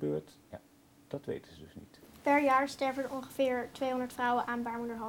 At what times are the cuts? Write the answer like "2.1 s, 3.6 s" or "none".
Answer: none